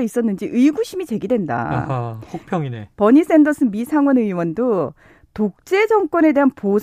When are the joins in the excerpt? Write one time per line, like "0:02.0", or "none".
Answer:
0:02.9

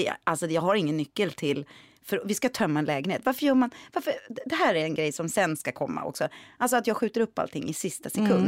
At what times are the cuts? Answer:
none

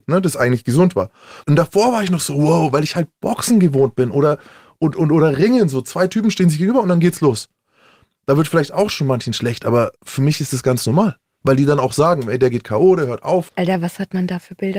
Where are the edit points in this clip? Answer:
0:01.4
0:10.0
0:13.5

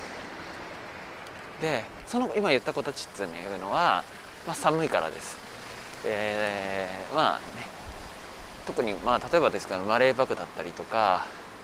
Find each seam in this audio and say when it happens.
0:02.0

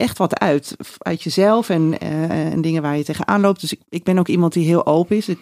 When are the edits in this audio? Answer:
0:03.8

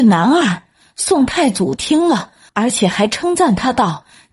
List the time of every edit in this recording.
0:02.5

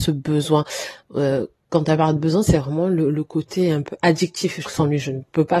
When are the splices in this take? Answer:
0:04.6

